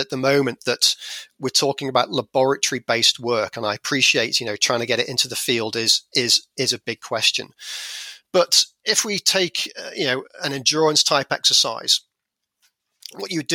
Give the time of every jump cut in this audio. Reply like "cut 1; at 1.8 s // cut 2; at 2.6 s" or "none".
none